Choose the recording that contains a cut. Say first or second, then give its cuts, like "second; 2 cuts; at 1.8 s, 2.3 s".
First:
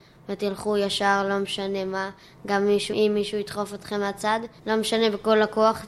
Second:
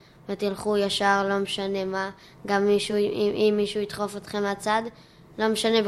first; 2 cuts; at 2.9 s, 4.6 s